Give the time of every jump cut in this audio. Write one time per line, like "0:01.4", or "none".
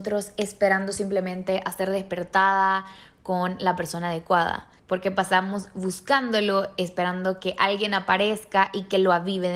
0:04.8